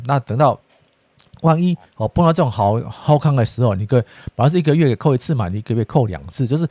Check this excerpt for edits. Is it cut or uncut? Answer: uncut